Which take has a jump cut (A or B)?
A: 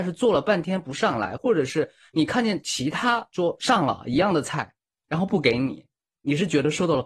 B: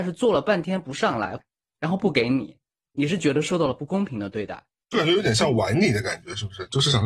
B